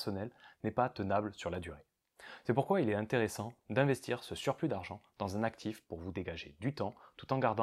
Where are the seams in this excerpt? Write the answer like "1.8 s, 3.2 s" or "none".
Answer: 3.6 s